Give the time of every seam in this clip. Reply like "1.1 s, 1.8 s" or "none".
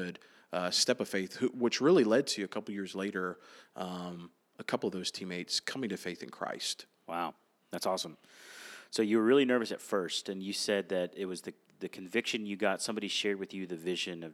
none